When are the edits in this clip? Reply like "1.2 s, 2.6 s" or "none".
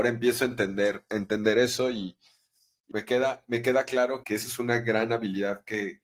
2.9 s, 4.2 s